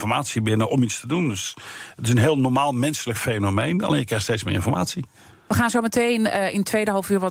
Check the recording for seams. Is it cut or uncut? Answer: uncut